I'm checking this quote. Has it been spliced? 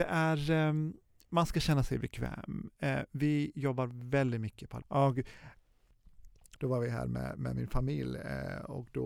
yes; 2 cuts; at 4.8 s, 6.6 s

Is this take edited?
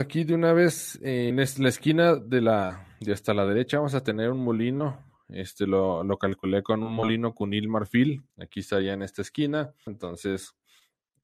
yes; 3 cuts; at 1.3 s, 8.3 s, 9.9 s

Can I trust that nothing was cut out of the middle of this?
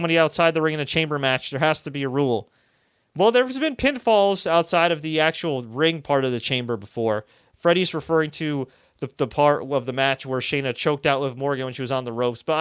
yes; 0 cuts

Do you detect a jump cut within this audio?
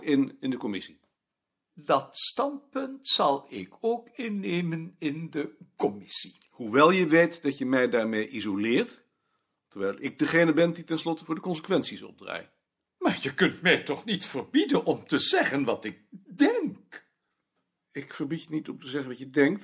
no; 0 cuts

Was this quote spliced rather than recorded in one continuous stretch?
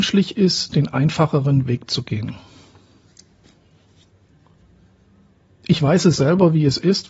no; 0 cuts

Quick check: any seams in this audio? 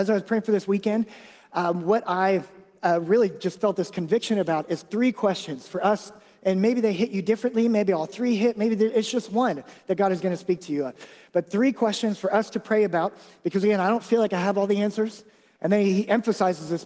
yes; 1 cut; at 15.5 s

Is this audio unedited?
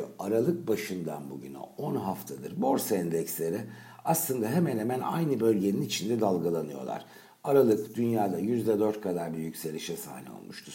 yes; 0 cuts

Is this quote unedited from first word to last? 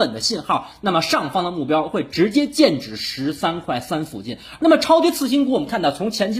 no; 1 cut; at 4.6 s

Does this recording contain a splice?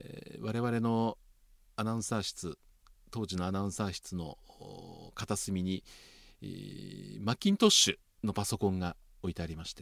no; 0 cuts

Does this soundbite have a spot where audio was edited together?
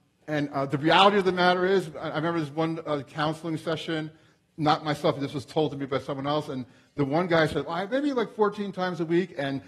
no; 0 cuts

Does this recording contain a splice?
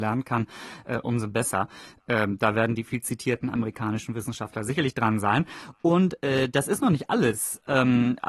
no; 0 cuts

